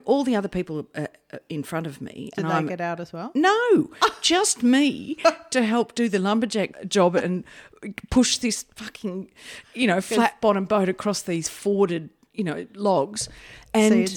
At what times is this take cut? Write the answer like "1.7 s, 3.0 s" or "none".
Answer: none